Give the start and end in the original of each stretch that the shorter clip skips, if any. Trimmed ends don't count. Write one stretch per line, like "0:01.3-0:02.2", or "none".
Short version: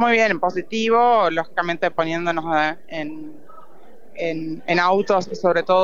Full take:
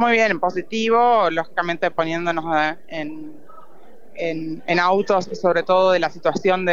none